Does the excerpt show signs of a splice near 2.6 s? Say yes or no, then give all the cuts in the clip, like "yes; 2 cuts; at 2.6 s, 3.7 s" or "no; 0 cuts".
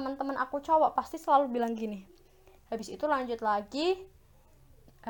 yes; 1 cut; at 2.6 s